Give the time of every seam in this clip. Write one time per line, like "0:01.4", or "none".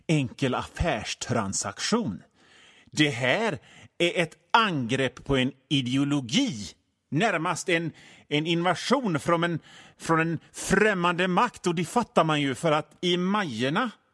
none